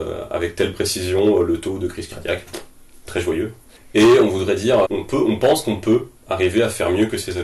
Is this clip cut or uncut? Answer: cut